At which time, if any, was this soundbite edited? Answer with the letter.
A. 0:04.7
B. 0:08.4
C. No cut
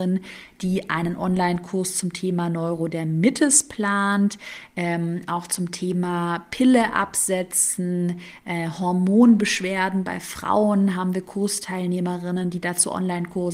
C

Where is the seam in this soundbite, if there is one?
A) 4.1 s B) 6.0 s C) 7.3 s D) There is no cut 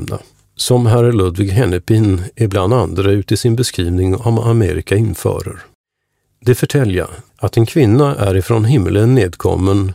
C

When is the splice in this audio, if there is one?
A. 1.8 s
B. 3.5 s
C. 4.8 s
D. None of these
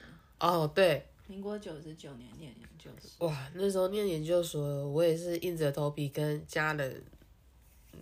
D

